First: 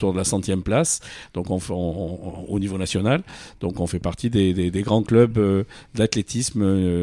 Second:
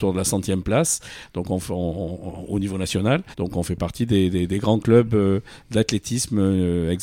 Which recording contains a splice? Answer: second; 1 cut; at 3.3 s

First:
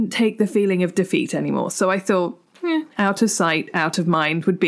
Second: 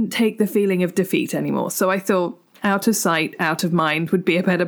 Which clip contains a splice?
second; 1 cut; at 2.6 s

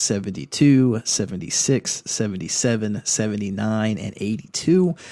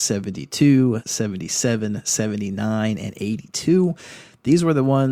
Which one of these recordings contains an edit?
second; 1 cut; at 1.0 s

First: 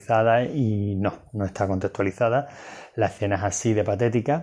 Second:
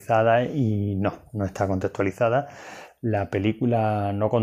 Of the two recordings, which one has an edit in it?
second; 1 cut; at 2.9 s

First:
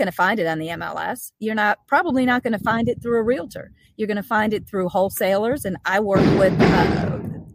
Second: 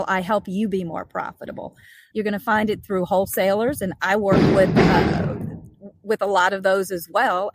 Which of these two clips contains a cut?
second; 1 cut; at 2.1 s

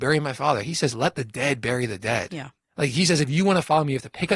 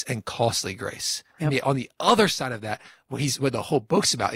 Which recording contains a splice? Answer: second; 1 cut; at 1.4 s

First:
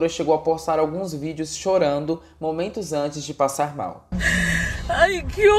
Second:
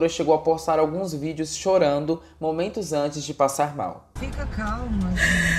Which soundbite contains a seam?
first; 1 cut; at 4.1 s

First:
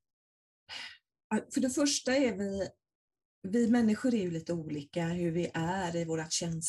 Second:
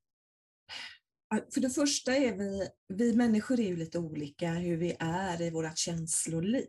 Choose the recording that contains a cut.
second; 1 cut; at 2.8 s

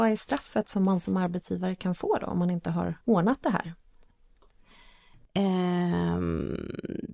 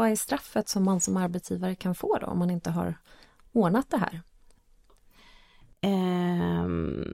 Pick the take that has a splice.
first; 1 cut; at 3.0 s

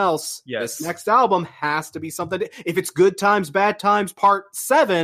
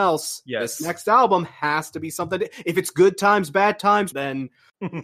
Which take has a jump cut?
second; 1 cut; at 4.1 s

